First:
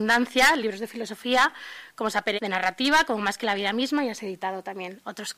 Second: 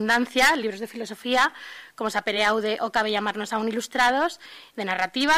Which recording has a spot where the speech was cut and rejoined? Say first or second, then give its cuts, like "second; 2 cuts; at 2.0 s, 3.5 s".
first; 1 cut; at 2.4 s